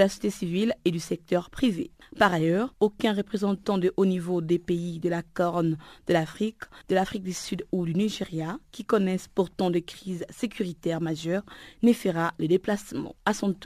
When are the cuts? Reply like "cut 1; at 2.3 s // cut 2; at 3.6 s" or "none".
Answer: none